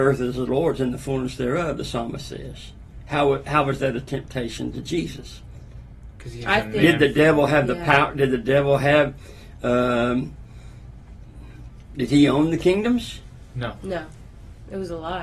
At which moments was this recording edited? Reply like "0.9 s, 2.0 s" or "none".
none

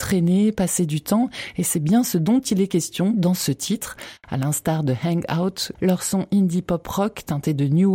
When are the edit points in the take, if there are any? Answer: 4.2 s, 5.8 s

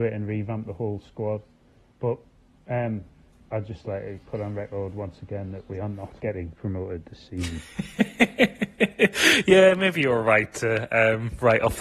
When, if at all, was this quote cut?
6.2 s

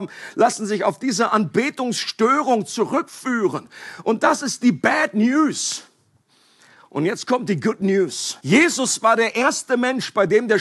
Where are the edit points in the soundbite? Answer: 8.4 s

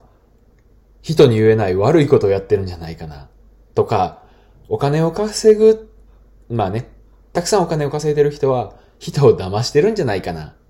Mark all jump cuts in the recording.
none

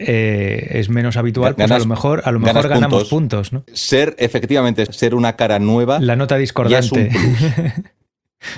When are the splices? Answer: 3.7 s, 4.9 s

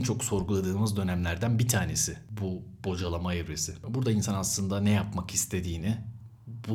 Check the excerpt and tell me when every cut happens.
none

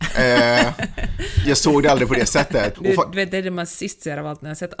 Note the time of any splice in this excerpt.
1.4 s, 2.7 s

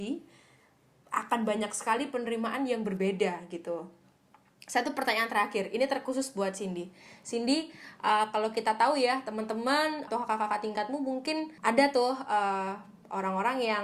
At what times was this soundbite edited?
10.1 s, 11.6 s

